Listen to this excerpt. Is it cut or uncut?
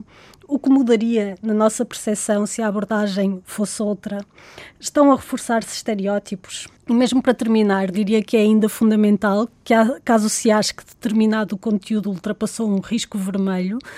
cut